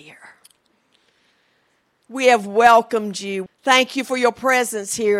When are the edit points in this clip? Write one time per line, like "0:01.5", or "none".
0:03.5

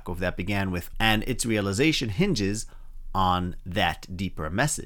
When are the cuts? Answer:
0:00.9

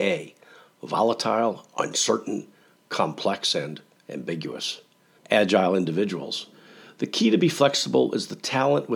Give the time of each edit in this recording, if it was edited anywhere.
0:05.2

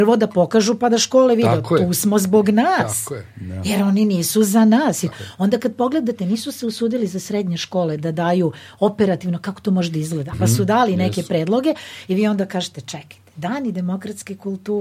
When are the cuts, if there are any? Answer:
0:05.1
0:10.3

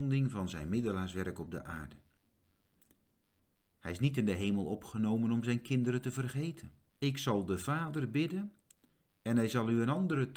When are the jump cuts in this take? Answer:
0:06.9

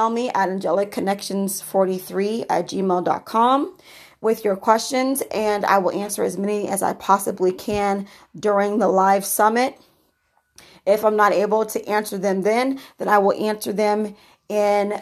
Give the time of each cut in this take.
none

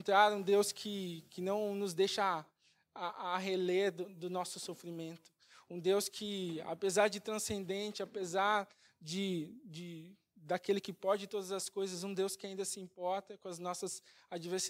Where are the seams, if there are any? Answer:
none

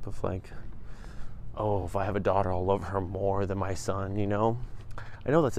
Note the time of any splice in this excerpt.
none

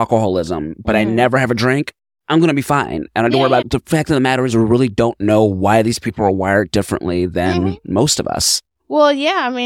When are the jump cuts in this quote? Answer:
0:03.6

